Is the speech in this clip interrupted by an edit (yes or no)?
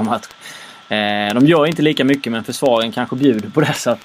no